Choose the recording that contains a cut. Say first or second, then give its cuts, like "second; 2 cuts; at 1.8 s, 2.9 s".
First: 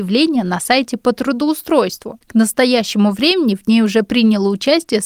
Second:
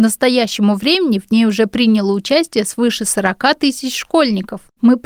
first; 1 cut; at 2.2 s